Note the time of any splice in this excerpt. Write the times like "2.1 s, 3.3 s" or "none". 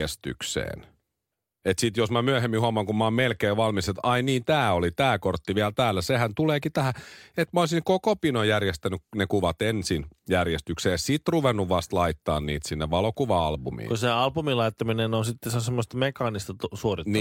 none